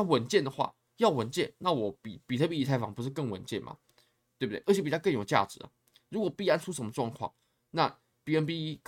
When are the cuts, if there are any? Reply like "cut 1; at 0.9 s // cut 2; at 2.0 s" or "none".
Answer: none